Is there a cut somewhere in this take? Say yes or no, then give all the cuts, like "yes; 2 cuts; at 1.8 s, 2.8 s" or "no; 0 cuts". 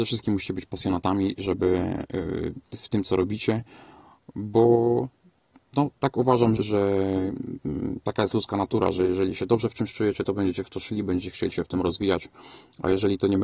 yes; 1 cut; at 6.6 s